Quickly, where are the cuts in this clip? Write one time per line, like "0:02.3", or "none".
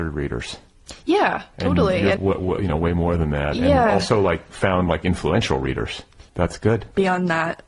0:02.2
0:06.3